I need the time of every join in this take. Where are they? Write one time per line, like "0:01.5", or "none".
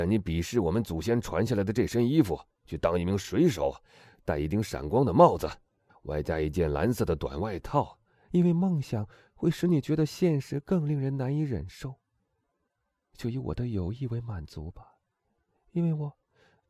0:02.5
0:05.9
0:08.3